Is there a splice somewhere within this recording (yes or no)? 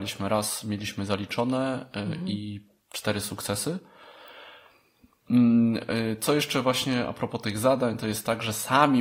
no